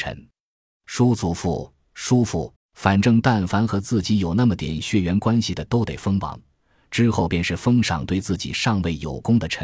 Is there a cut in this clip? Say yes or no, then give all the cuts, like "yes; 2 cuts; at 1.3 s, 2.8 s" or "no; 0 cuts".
yes; 1 cut; at 2.6 s